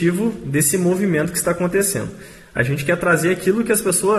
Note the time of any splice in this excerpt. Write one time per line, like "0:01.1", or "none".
none